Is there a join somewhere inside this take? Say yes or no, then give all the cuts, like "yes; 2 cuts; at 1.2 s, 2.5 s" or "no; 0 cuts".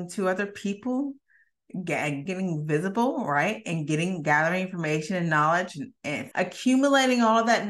yes; 2 cuts; at 2.3 s, 6.3 s